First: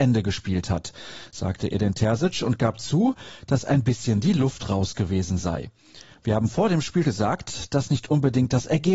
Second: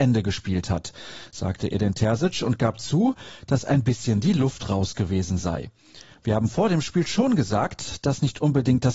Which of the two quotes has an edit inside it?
first; 1 cut; at 7.0 s

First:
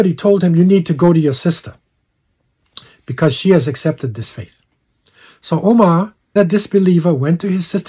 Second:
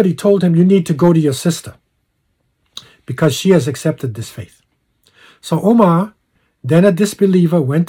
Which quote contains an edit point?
first; 1 cut; at 6.4 s

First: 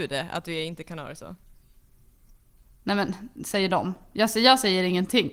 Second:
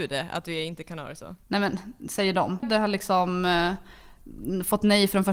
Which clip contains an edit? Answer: second; 2 cuts; at 1.4 s, 2.6 s

